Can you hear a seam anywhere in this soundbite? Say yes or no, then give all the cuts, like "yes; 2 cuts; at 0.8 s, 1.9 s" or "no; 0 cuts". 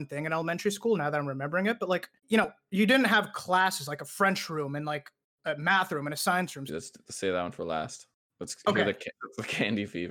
yes; 2 cuts; at 2.2 s, 6.7 s